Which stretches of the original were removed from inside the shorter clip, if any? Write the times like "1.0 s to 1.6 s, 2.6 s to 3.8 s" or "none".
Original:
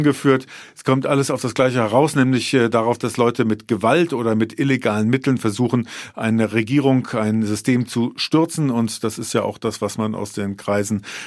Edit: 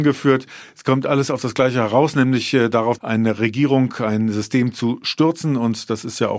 3.0 s to 6.1 s